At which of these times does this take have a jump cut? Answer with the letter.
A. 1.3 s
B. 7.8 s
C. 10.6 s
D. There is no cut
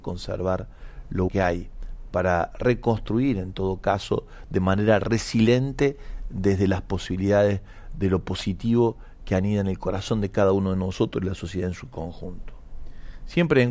A